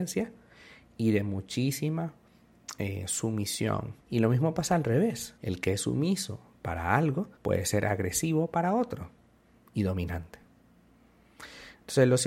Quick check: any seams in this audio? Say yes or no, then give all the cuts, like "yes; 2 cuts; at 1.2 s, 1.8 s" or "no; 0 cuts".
yes; 3 cuts; at 4.0 s, 5.4 s, 7.4 s